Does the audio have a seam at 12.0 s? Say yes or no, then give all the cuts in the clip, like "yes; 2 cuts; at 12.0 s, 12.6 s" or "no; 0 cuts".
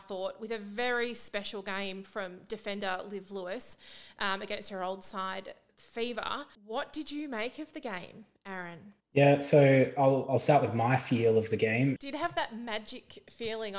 yes; 2 cuts; at 6.5 s, 12.0 s